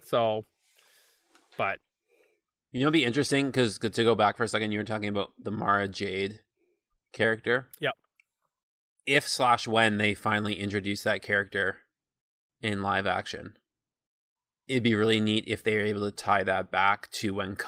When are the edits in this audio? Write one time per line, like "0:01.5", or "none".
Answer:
none

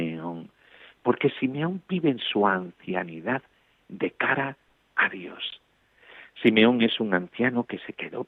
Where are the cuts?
0:00.9

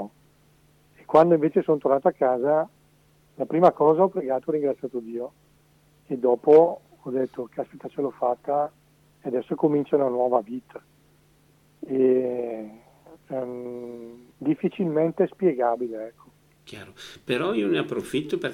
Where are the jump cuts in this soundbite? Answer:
0:13.2
0:14.3

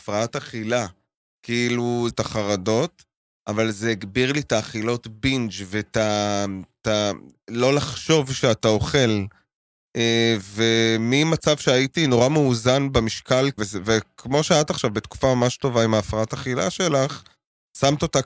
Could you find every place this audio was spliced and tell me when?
0:02.1
0:13.6

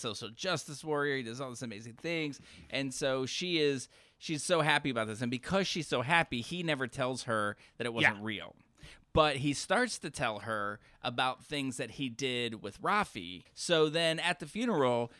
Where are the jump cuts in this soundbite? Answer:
0:13.5

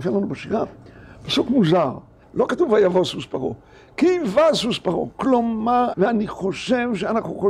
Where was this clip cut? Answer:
0:02.2
0:05.9

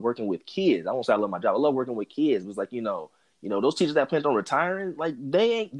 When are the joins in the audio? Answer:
none

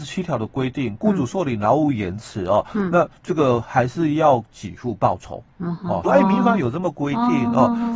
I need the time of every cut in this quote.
0:03.2
0:06.0

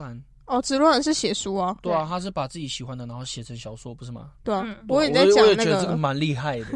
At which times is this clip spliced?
none

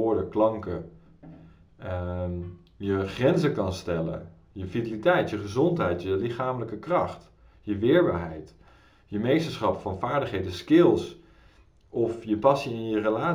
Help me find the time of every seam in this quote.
none

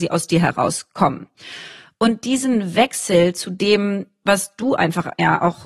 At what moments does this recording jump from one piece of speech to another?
none

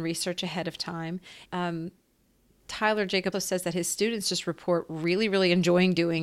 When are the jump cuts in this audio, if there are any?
0:01.5
0:03.3

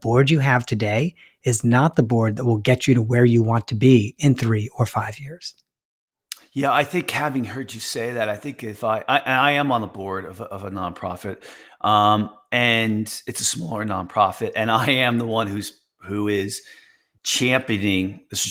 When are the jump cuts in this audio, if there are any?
0:17.2

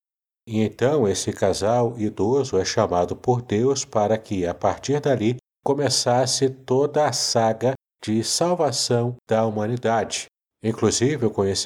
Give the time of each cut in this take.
none

